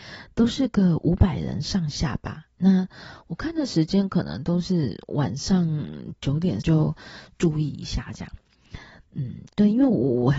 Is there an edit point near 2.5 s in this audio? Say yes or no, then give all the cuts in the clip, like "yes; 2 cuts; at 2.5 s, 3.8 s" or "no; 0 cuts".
no; 2 cuts; at 6.6 s, 9.0 s